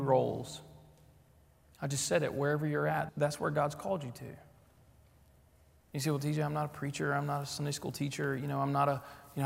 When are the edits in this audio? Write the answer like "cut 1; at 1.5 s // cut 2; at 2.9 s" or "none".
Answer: cut 1; at 3.1 s

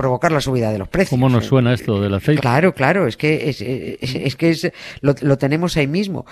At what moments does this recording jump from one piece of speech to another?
cut 1; at 2.4 s

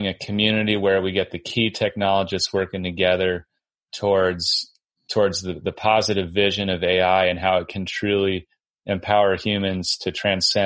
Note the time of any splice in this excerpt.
none

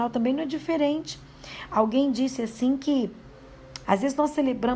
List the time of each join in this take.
cut 1; at 3.8 s

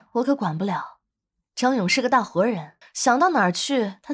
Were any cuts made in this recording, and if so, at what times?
cut 1; at 2.8 s

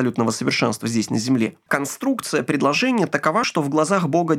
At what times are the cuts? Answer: cut 1; at 1.7 s // cut 2; at 3.4 s

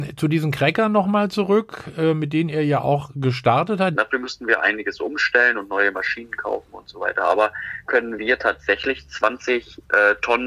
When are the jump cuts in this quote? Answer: cut 1; at 3.9 s // cut 2; at 7.9 s

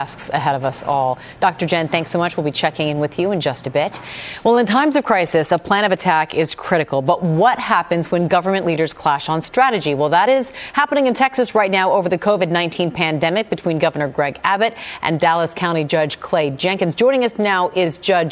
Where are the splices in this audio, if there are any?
none

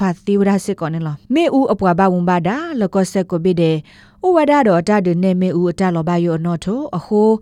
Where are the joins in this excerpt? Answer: cut 1; at 1.2 s

